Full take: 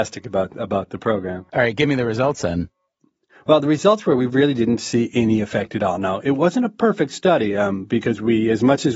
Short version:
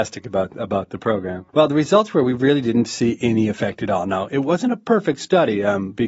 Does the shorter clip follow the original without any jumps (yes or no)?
no